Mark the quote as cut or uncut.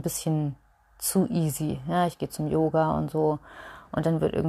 uncut